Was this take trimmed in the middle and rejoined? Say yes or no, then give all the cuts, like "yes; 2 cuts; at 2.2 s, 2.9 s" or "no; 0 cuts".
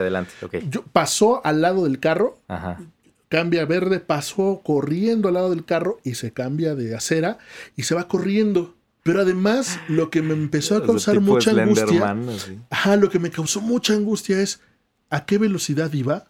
yes; 1 cut; at 9.0 s